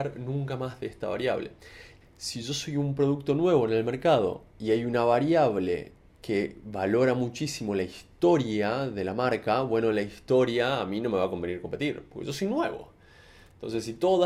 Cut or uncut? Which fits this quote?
cut